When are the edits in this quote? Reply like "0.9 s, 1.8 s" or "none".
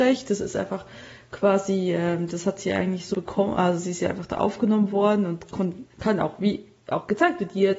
3.1 s